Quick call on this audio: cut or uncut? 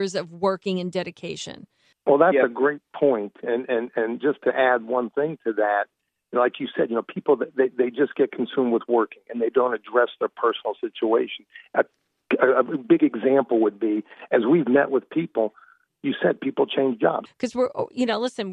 cut